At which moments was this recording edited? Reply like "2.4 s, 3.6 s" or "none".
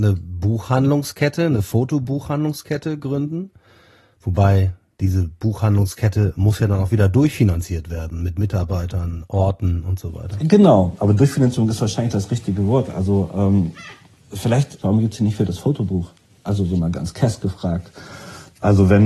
14.8 s